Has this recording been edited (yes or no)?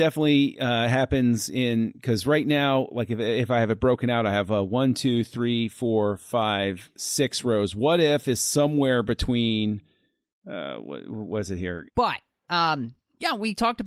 yes